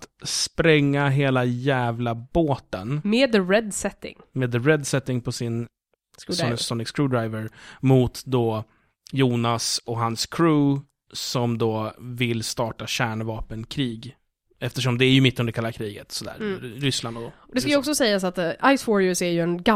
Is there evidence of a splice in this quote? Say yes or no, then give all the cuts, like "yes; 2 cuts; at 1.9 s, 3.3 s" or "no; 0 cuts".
no; 0 cuts